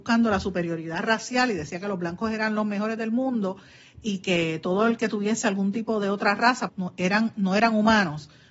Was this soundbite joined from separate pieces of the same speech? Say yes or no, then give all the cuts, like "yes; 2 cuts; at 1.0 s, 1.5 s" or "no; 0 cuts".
yes; 1 cut; at 6.7 s